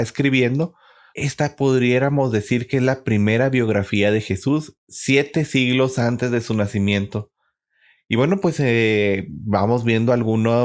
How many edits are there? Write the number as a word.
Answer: one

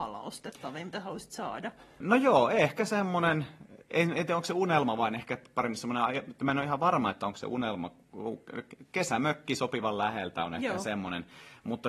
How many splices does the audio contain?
one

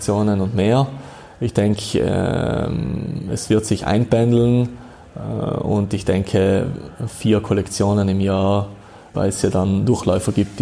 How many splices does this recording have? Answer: one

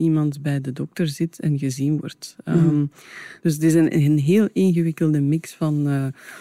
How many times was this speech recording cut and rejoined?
zero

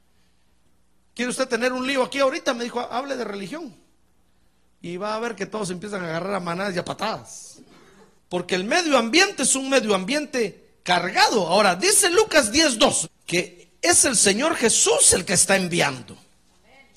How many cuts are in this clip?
two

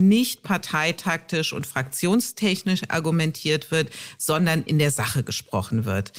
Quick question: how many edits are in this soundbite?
zero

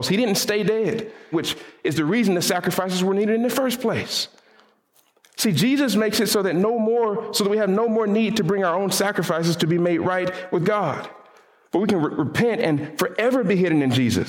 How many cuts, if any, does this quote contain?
one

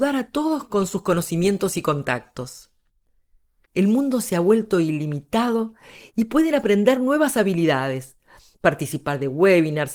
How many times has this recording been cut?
one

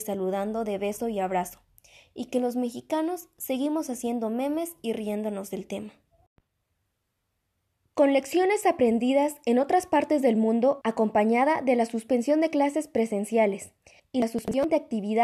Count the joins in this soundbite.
two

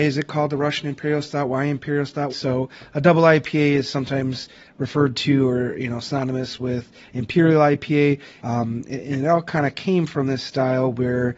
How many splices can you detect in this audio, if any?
two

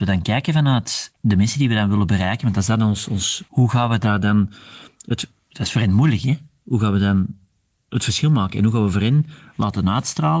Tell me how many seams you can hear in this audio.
two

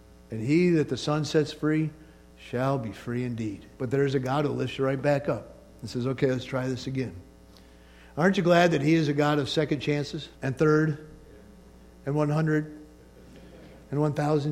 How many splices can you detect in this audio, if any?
two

